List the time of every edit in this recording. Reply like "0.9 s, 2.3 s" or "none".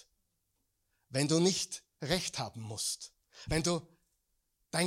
3.5 s